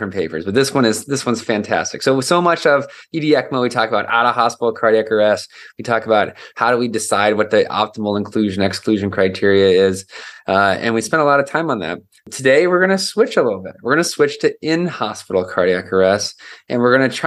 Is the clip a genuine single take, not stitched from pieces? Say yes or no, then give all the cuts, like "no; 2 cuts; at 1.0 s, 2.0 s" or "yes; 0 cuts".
yes; 0 cuts